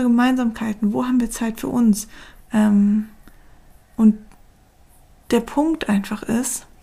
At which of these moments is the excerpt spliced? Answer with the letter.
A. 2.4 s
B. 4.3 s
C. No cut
A